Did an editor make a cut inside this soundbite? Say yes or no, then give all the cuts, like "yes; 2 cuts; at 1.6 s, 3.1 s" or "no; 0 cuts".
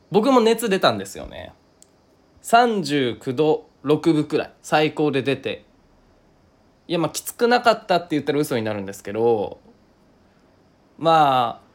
yes; 1 cut; at 4.6 s